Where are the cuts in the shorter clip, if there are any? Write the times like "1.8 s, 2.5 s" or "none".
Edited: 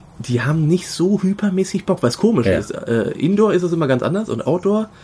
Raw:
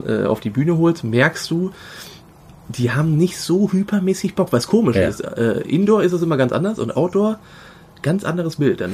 none

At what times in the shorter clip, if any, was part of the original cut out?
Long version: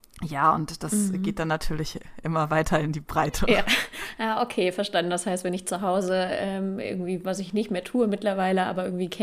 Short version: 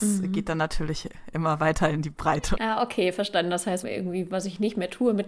2.6 s, 3.8 s

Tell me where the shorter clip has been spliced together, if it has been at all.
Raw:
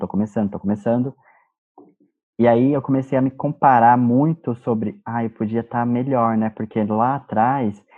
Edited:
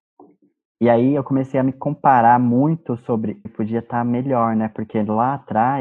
3.5 s

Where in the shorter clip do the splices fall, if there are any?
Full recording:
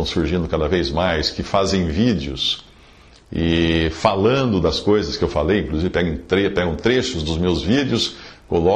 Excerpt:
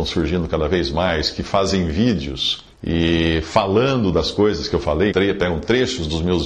2.7 s, 5.1 s

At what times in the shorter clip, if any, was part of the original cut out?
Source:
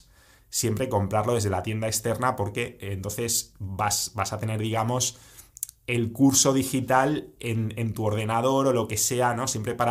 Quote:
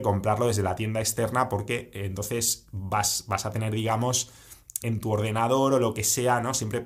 4.8 s

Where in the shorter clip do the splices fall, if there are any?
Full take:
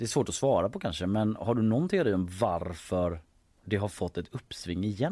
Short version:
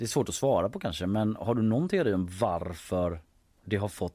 none

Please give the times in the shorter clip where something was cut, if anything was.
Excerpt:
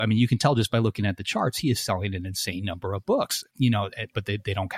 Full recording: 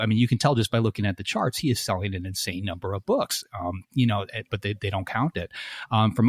3.5 s

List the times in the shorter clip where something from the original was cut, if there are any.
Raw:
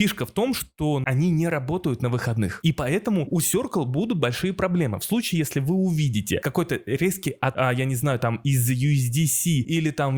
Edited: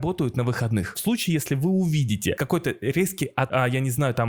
0.9 s

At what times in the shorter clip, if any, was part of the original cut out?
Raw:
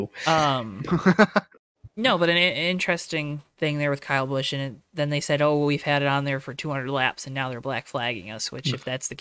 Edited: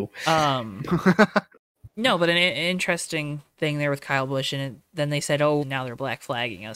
5.6 s

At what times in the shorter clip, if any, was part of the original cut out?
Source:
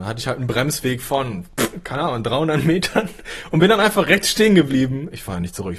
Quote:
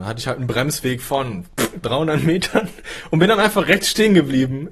1.8 s

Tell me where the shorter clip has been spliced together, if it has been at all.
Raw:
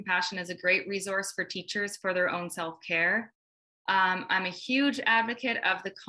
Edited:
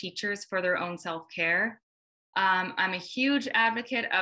none

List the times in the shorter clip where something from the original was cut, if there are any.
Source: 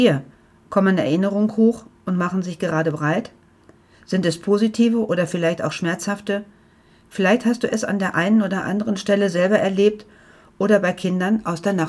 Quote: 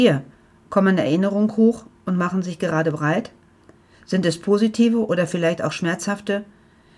none

